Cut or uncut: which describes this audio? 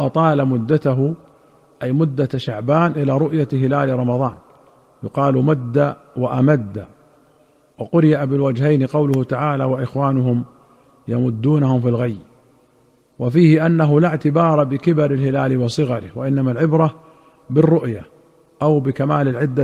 uncut